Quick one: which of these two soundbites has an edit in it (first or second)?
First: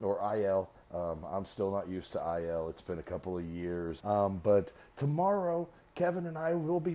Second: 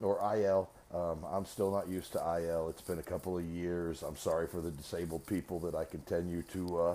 first